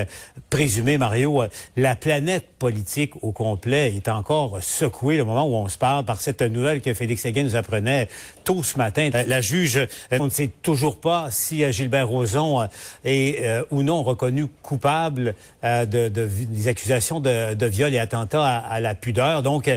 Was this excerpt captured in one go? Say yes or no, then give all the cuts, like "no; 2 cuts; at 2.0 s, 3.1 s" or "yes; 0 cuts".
no; 2 cuts; at 9.1 s, 10.2 s